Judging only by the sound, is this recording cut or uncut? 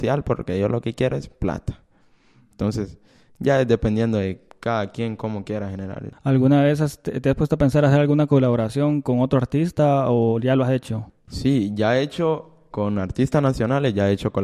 cut